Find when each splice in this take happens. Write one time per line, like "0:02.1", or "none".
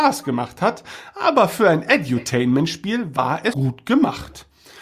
0:03.5